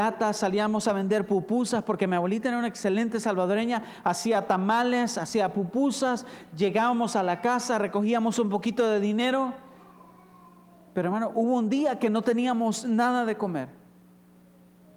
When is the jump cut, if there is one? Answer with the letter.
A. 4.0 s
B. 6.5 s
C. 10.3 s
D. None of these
B